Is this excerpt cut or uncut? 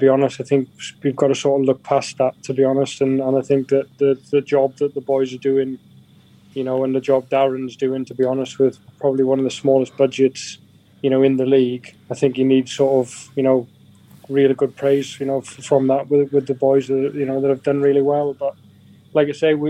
cut